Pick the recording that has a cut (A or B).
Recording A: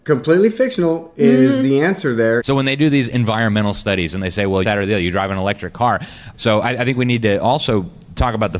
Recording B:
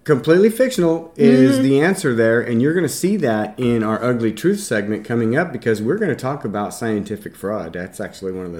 A